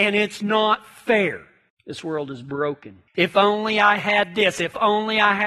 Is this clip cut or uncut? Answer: cut